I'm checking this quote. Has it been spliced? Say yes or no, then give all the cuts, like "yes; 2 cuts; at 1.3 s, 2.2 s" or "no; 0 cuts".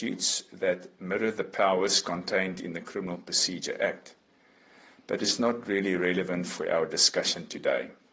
no; 0 cuts